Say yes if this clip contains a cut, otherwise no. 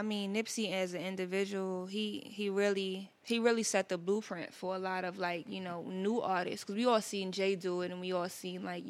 yes